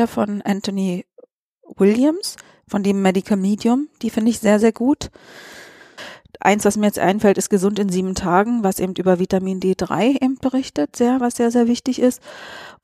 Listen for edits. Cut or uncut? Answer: uncut